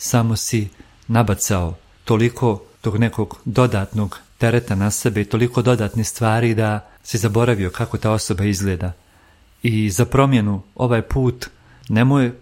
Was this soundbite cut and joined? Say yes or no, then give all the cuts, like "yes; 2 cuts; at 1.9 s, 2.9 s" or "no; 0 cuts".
no; 0 cuts